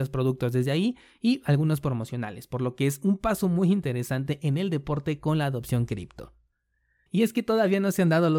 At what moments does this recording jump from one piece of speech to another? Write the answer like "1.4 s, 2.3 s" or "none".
7.1 s